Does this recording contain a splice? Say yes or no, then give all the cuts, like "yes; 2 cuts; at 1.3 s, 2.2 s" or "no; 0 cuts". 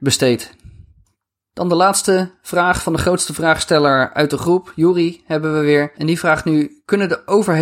no; 0 cuts